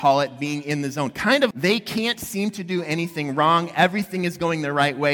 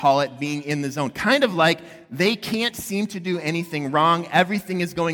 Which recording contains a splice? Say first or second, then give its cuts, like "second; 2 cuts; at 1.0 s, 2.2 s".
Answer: first; 1 cut; at 1.5 s